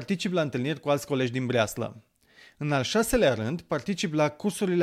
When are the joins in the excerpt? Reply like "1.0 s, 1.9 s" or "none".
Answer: none